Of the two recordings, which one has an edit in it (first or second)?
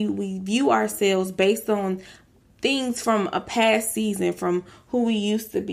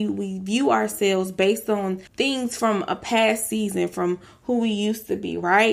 second